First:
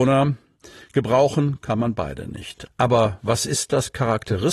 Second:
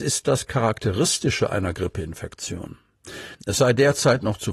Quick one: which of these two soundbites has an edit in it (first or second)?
second